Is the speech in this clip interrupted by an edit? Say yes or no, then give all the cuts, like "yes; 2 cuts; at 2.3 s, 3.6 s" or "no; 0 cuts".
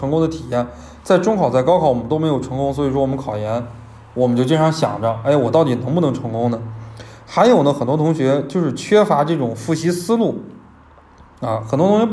no; 0 cuts